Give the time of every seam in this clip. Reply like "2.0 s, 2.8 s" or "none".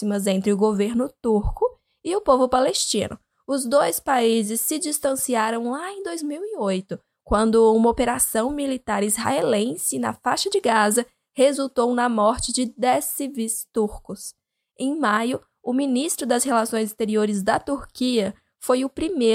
none